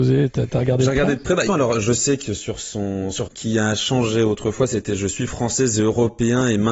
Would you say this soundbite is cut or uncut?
cut